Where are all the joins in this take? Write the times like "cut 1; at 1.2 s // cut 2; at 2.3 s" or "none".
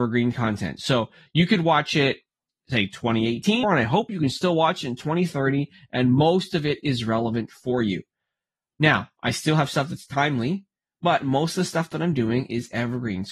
cut 1; at 3.6 s